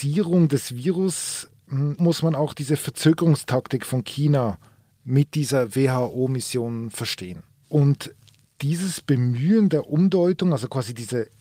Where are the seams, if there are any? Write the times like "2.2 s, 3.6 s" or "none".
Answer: 2.0 s, 7.6 s